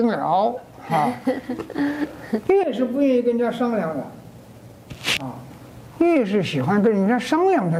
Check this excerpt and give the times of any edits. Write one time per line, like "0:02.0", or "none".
0:05.9